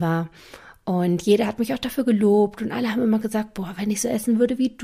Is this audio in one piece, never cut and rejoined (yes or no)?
yes